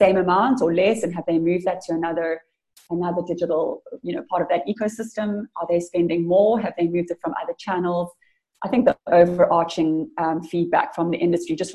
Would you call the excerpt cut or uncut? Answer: uncut